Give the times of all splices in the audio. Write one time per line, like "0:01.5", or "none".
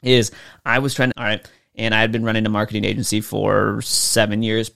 0:01.1